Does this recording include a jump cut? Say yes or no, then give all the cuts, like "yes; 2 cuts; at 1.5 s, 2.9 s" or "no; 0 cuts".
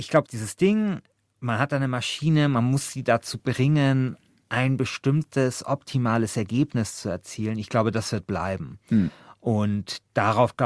no; 0 cuts